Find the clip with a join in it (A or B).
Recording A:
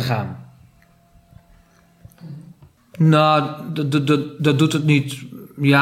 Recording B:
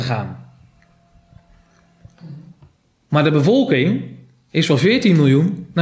A